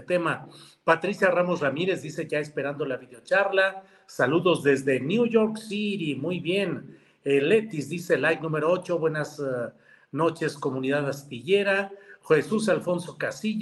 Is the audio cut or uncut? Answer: uncut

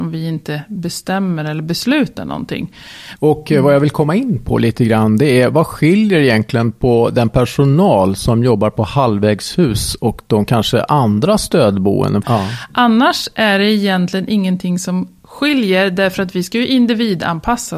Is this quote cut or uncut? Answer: cut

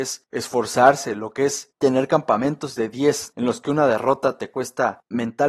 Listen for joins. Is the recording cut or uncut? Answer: cut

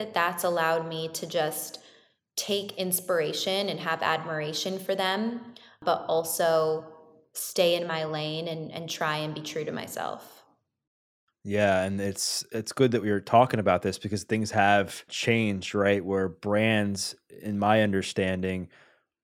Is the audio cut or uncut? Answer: uncut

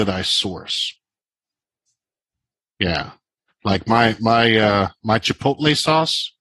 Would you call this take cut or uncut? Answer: uncut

